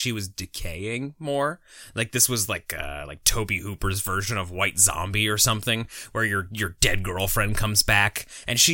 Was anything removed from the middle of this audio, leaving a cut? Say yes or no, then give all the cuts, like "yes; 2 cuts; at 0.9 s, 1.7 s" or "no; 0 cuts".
no; 0 cuts